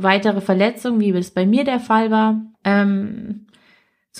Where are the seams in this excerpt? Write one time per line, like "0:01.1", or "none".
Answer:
0:02.5